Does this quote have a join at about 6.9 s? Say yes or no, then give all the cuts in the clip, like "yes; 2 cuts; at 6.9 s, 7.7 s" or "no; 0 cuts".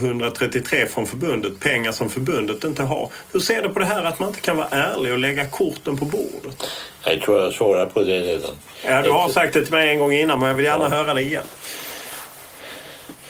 no; 0 cuts